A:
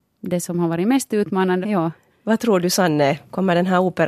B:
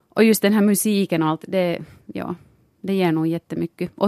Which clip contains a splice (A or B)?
A